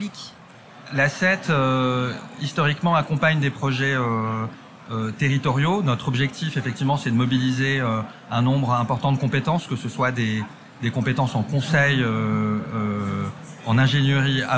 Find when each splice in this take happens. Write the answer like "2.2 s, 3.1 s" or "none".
none

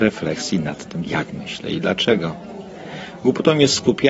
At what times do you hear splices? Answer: 1.1 s

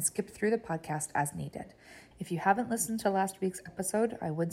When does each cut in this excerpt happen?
2.1 s

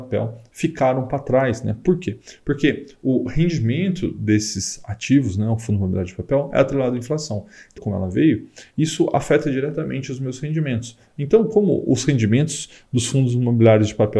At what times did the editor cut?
7.8 s

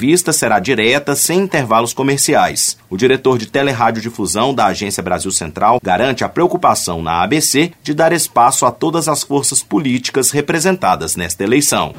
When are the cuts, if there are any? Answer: 5.8 s

